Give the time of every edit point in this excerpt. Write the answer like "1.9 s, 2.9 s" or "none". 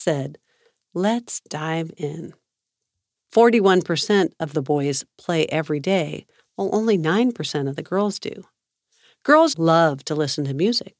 3.2 s, 9.5 s